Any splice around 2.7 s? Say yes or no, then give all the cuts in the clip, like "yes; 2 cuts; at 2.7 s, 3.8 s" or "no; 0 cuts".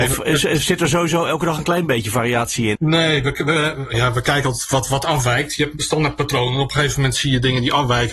yes; 1 cut; at 2.7 s